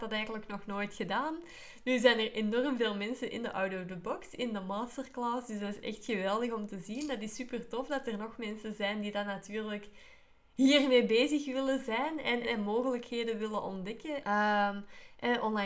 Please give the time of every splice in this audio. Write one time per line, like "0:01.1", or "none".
0:12.4
0:14.2